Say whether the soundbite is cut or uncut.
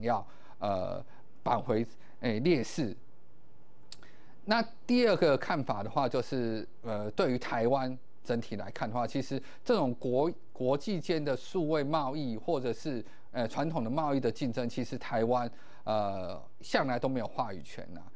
uncut